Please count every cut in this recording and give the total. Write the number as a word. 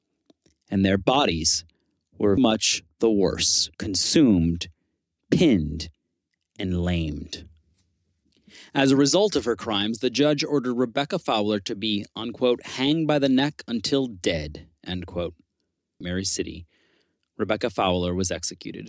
three